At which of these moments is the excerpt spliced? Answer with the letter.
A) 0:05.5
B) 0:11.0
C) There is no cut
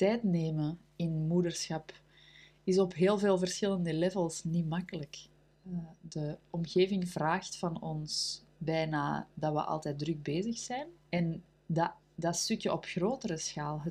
B